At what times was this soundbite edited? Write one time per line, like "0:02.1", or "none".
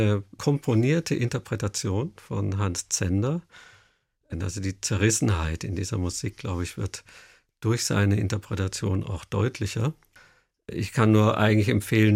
none